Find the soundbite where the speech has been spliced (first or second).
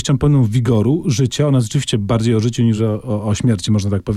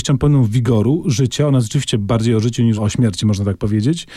second